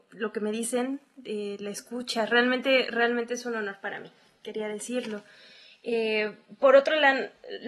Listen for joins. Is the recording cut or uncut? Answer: uncut